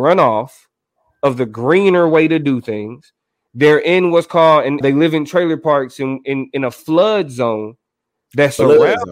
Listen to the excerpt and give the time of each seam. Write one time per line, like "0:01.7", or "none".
0:04.8